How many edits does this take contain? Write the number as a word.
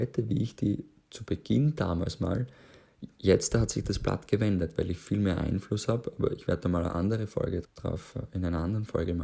one